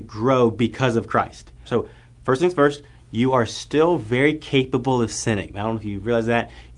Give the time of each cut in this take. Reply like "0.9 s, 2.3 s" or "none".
1.6 s